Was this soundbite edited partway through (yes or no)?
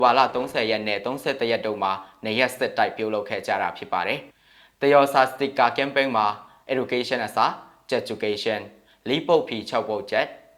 yes